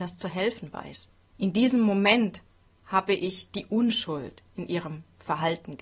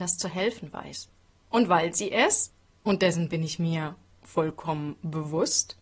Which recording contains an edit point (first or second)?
first